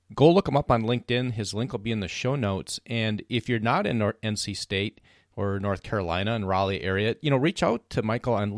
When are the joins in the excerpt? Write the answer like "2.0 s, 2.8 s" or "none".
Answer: none